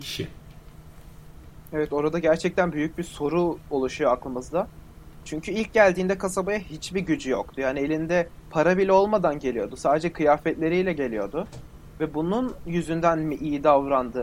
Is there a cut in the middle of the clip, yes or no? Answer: no